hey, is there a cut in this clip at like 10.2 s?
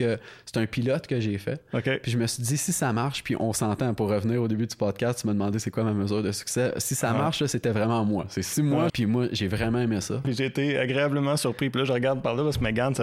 yes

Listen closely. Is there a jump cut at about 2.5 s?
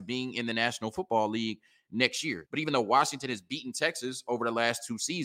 yes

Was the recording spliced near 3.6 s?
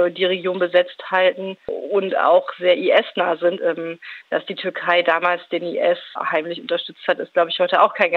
yes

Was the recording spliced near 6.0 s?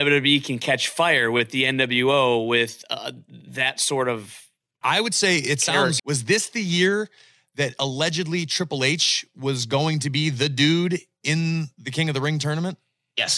yes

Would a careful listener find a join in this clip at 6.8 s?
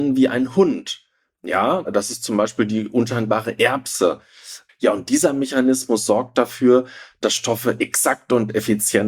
no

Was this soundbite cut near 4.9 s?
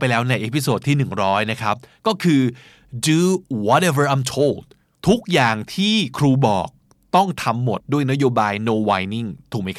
no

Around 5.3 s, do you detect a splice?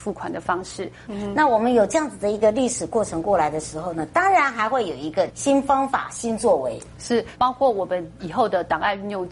yes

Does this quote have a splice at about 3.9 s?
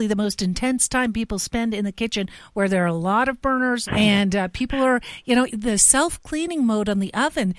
yes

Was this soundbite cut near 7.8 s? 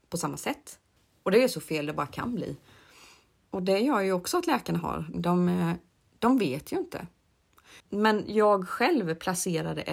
yes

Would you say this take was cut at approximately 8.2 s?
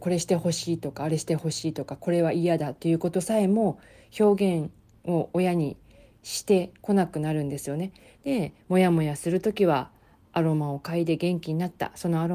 yes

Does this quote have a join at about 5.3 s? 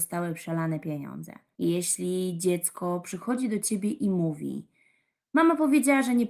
no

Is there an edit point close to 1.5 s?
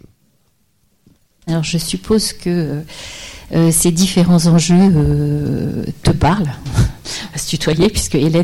yes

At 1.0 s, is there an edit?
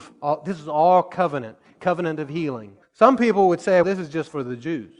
no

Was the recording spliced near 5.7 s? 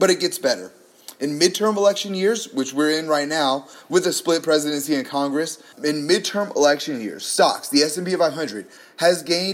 yes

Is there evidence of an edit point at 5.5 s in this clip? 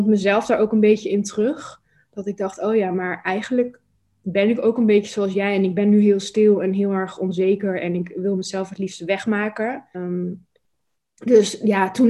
no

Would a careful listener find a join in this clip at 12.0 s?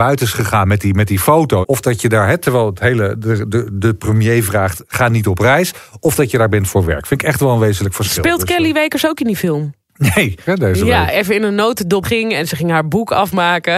yes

